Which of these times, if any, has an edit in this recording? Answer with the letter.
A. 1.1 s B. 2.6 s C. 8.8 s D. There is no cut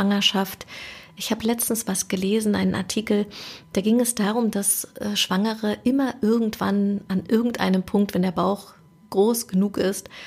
D